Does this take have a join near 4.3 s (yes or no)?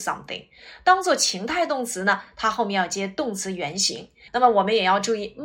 yes